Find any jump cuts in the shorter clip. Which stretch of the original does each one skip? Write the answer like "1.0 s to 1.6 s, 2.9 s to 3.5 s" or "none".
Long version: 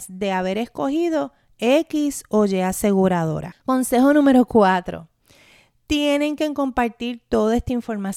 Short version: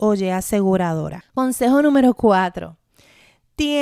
none